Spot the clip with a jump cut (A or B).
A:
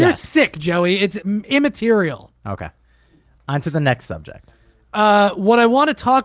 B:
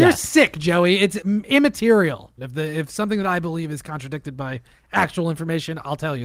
B